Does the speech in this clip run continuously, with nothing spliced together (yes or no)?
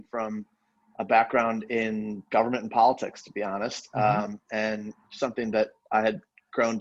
yes